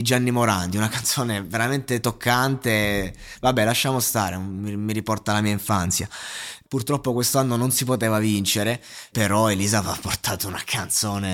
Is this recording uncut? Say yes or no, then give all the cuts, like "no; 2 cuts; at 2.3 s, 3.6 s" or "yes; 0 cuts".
no; 2 cuts; at 6.6 s, 9.1 s